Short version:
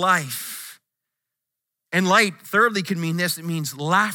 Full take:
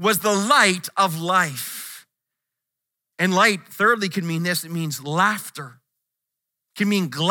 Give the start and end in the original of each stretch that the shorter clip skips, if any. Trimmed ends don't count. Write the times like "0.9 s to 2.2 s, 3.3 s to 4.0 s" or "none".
none

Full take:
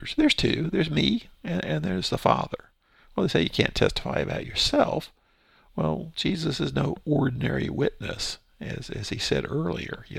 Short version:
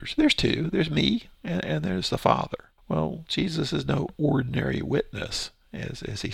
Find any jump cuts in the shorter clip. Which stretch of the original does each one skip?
2.8 s to 5.7 s

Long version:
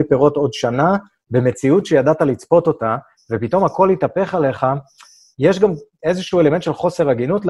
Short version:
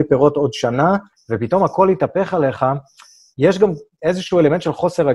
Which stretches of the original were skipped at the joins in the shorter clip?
1.1 s to 3.1 s

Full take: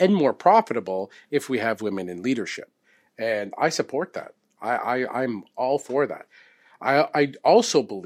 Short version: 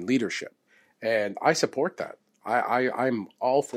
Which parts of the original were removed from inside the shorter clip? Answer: none

